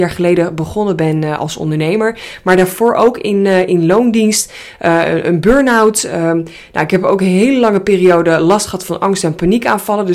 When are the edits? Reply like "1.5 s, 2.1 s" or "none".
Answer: none